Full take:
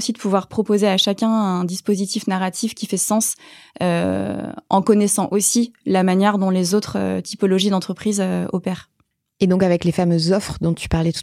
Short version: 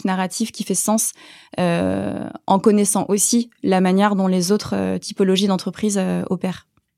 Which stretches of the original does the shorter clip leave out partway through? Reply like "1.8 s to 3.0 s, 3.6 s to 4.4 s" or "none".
none